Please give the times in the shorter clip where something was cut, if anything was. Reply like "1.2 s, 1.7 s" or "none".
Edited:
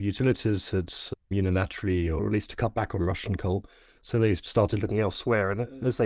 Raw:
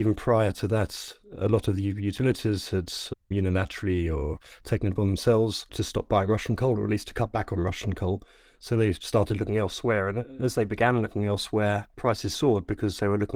2.2 s